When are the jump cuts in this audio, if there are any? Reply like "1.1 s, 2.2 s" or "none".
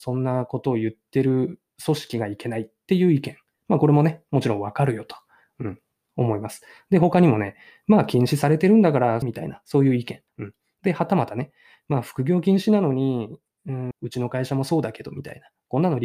9.2 s, 10.3 s, 13.9 s